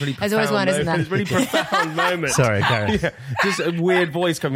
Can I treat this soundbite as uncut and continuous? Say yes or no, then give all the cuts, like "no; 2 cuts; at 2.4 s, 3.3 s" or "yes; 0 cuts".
yes; 0 cuts